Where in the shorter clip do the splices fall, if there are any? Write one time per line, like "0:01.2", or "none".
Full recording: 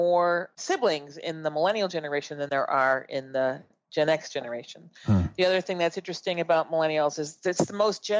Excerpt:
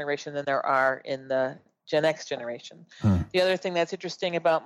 none